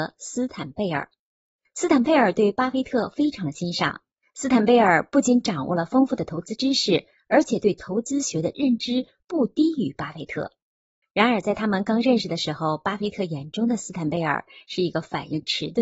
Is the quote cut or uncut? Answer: cut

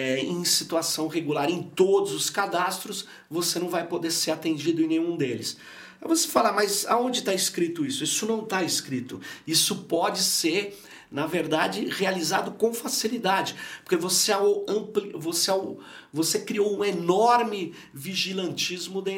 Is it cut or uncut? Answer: uncut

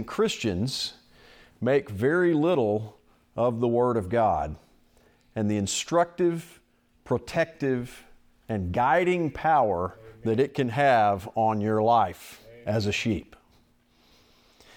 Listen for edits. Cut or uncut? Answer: uncut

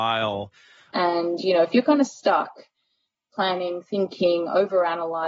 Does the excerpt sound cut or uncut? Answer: cut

